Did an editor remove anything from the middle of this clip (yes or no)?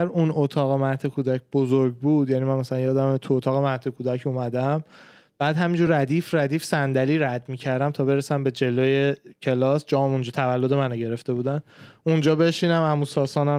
no